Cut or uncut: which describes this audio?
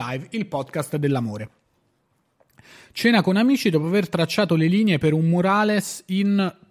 uncut